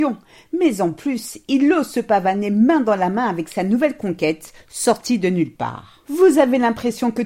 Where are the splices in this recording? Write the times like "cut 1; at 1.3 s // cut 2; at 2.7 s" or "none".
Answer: none